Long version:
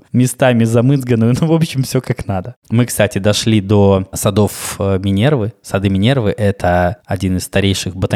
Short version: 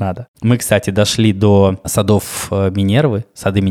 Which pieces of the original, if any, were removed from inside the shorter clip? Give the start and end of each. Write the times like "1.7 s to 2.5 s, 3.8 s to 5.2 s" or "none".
none

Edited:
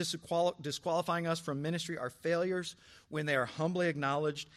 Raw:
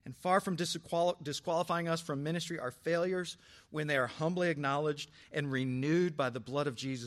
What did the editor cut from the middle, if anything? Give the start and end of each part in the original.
none

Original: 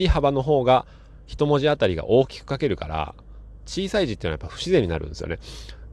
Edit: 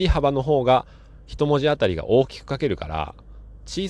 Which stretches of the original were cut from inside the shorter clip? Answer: none

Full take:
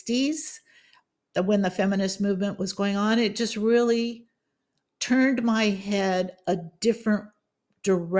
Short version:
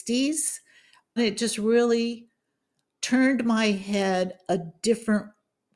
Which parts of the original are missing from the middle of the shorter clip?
1.2 s to 3.1 s

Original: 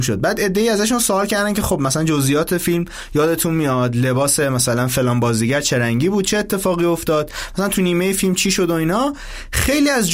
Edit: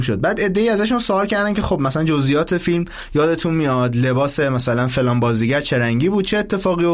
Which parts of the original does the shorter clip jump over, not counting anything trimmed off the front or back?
none

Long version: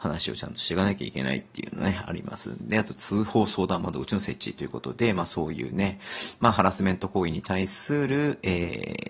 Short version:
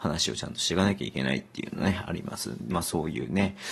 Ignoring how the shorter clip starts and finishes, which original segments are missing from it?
2.7 s to 5.1 s

